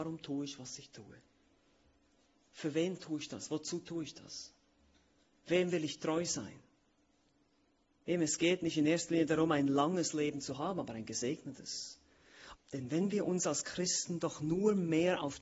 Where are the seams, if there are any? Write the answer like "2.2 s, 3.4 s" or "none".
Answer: 12.5 s